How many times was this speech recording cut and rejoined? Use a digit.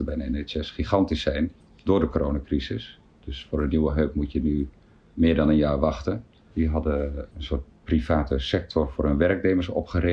1